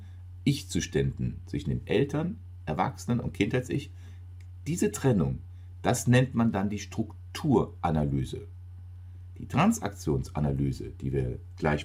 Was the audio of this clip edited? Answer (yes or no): no